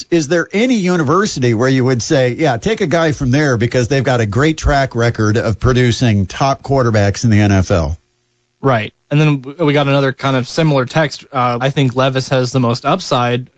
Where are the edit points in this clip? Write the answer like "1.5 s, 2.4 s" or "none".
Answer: 11.6 s